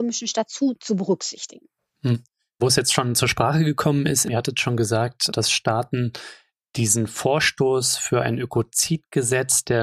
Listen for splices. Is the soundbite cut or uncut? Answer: cut